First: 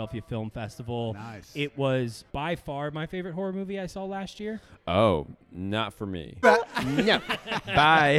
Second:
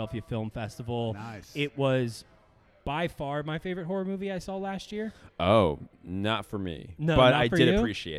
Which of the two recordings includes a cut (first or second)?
first